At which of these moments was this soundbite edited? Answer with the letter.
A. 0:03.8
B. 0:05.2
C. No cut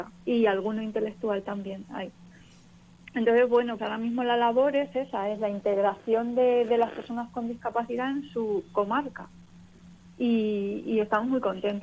A